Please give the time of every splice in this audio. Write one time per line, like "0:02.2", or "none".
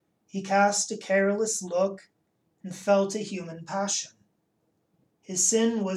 none